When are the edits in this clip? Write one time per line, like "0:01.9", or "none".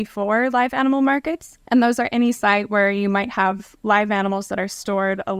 0:01.7